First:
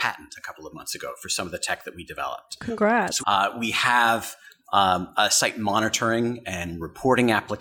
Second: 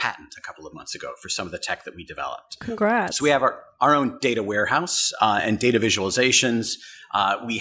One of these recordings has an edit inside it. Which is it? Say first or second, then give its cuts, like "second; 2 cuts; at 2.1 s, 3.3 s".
first; 1 cut; at 3.2 s